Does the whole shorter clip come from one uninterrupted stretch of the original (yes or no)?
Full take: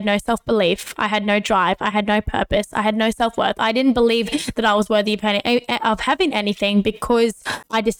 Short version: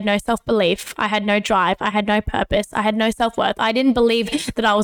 yes